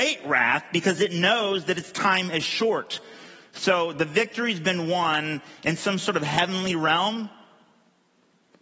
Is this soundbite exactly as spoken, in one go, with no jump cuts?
yes; 0 cuts

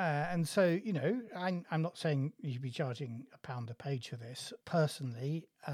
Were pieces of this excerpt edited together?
yes; 1 cut; at 4.6 s

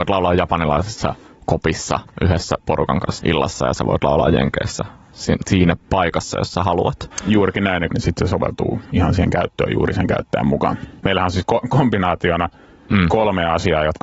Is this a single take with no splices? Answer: no; 3 cuts; at 3.2 s, 7.9 s, 11.0 s

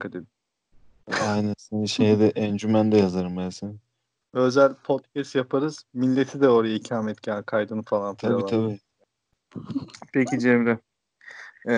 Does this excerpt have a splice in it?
yes; 1 cut; at 4.2 s

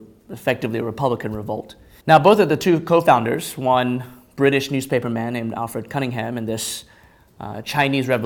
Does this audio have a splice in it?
yes; 1 cut; at 2.0 s

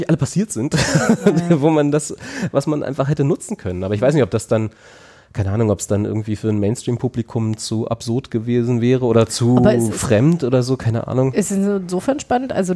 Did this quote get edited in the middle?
no; 0 cuts

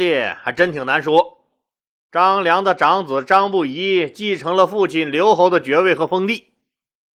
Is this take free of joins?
no; 1 cut; at 2.0 s

